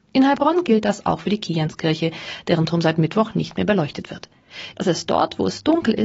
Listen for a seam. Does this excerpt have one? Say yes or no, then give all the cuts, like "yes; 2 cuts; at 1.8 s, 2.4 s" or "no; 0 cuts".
yes; 1 cut; at 4.7 s